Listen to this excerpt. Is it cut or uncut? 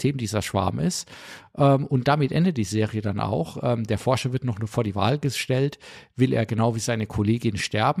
uncut